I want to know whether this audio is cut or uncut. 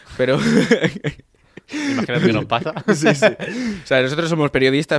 uncut